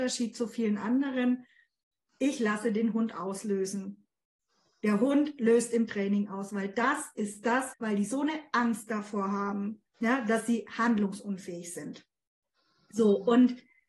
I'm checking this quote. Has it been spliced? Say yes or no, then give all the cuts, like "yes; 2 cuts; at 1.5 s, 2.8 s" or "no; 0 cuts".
yes; 2 cuts; at 7.7 s, 9.9 s